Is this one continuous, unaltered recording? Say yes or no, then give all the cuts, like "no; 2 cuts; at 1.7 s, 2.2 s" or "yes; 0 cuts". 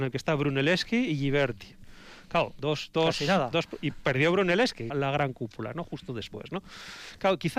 no; 1 cut; at 4.9 s